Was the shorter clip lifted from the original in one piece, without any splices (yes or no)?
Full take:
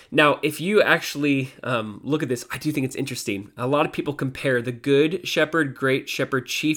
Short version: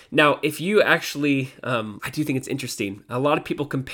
no